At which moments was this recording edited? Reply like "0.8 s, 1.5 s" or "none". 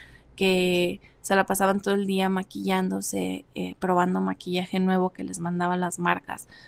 none